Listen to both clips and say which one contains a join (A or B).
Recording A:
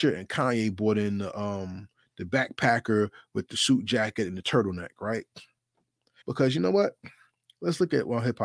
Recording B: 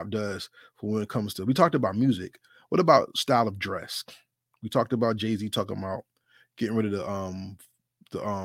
A